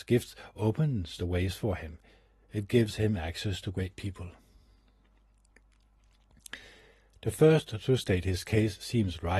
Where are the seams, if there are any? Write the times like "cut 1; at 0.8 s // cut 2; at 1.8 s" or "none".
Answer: none